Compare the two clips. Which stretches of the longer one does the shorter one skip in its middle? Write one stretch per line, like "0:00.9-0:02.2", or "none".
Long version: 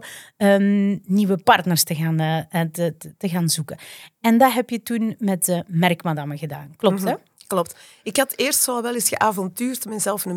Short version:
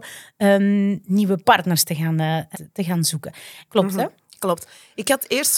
0:02.5-0:03.0
0:04.1-0:06.8